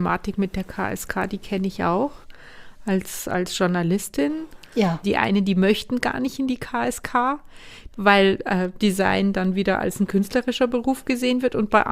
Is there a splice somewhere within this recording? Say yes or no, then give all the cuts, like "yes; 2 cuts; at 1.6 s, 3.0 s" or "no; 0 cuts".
yes; 2 cuts; at 5.0 s, 7.9 s